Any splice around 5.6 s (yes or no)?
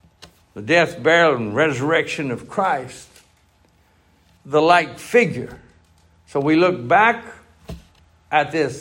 no